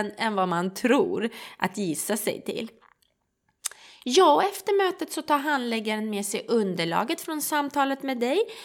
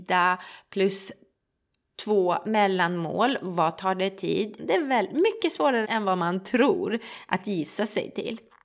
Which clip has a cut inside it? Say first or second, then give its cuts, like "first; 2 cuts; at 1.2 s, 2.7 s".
second; 2 cuts; at 4.6 s, 5.8 s